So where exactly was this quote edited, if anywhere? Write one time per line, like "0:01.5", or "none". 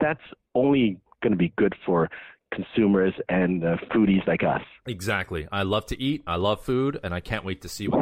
none